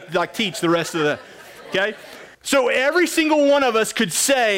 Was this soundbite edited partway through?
yes; 1 cut; at 2.3 s

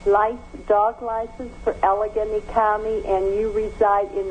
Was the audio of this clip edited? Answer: no; 0 cuts

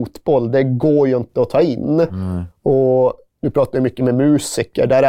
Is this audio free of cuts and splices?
yes; 0 cuts

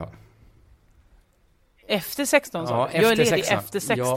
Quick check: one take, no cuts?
yes; 0 cuts

